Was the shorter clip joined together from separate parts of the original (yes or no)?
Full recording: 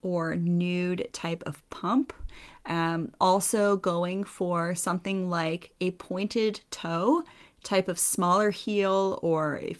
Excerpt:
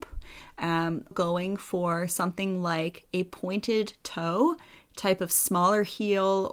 yes